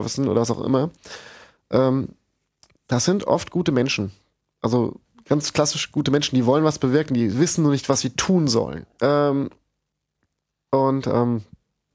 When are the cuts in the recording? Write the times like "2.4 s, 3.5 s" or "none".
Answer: 9.0 s